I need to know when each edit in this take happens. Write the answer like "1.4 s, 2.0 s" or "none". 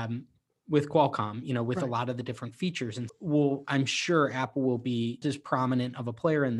3.1 s, 5.2 s